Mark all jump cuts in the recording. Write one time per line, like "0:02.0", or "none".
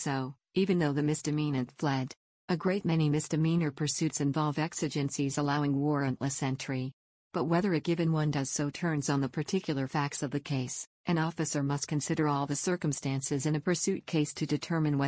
0:02.3
0:11.0